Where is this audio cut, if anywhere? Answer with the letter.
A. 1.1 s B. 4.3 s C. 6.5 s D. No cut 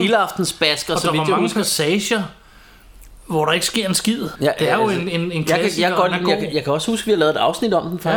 B